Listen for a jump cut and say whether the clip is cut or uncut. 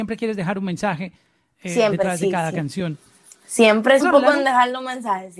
cut